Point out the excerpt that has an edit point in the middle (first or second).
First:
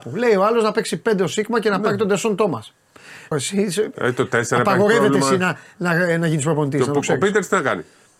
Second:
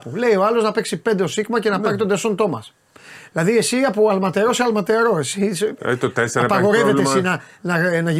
first